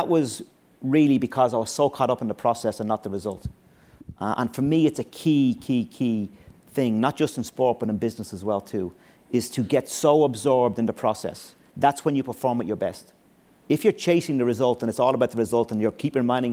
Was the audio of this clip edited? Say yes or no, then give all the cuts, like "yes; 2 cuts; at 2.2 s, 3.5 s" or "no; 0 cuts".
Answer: no; 0 cuts